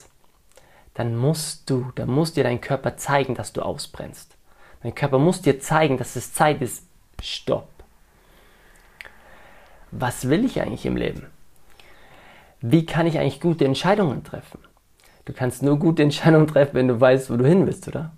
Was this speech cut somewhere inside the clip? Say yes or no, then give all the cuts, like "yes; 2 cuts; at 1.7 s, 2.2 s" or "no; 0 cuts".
yes; 1 cut; at 9.8 s